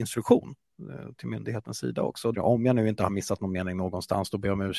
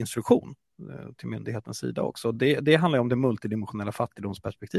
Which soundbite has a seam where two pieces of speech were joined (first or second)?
first